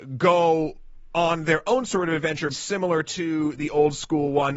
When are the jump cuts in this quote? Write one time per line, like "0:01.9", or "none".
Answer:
0:02.5

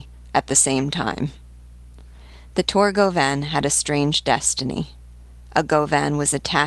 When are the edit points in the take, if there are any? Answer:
none

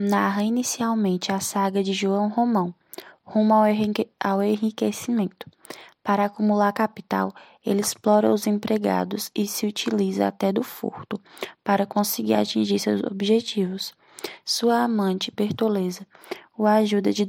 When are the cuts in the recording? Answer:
0:14.4

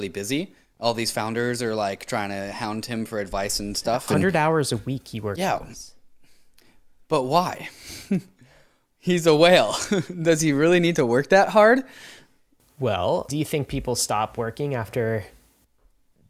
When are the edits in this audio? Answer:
0:13.3

